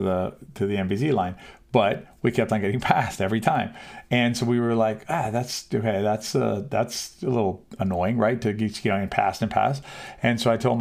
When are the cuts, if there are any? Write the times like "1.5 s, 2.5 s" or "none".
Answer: none

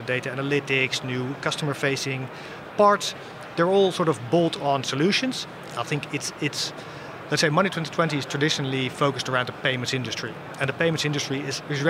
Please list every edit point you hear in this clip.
5.7 s

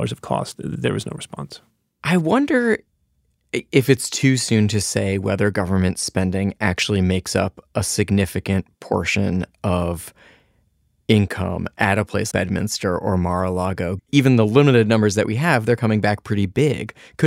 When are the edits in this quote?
12.3 s, 14.0 s

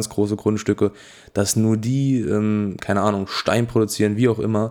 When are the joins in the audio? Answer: none

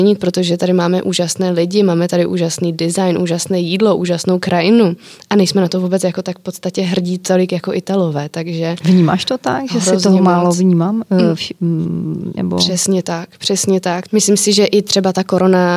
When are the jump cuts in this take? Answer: 12.4 s, 14.1 s

